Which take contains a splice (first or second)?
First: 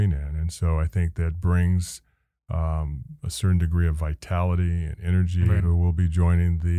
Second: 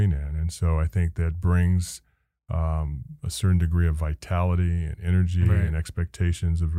first